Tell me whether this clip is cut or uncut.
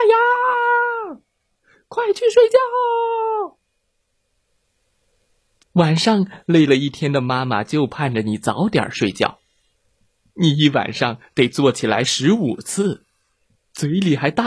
cut